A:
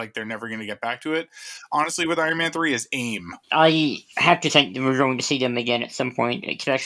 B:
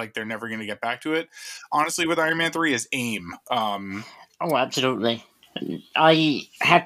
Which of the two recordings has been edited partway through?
A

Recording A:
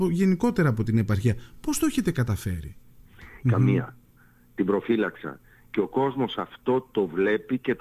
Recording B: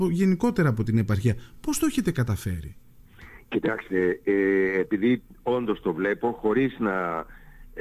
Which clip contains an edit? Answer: A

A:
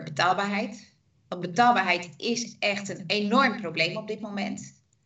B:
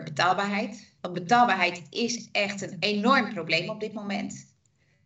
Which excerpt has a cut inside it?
B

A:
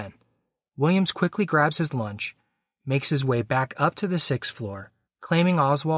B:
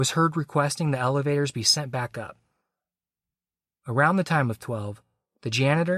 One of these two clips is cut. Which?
A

